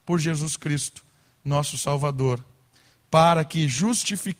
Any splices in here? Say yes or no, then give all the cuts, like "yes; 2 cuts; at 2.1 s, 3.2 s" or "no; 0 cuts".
no; 0 cuts